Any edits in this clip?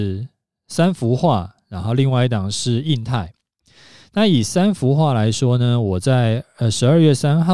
no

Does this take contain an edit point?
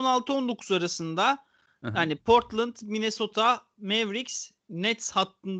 no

